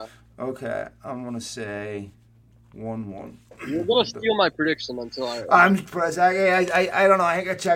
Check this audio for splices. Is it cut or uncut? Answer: uncut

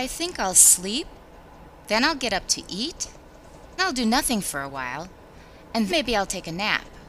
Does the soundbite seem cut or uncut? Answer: cut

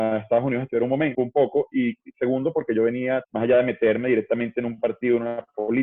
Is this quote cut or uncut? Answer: cut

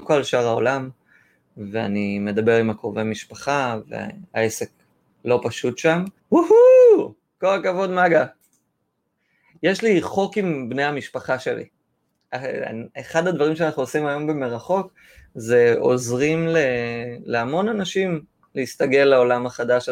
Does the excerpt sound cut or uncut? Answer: cut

